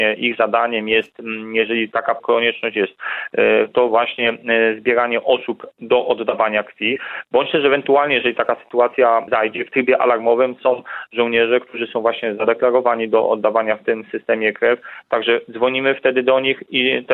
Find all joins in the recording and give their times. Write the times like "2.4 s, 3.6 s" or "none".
none